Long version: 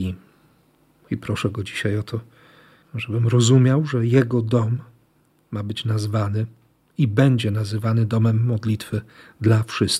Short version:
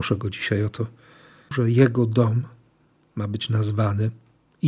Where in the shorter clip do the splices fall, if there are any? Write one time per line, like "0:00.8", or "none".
0:01.5